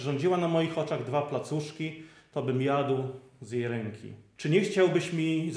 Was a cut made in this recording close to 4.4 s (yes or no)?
yes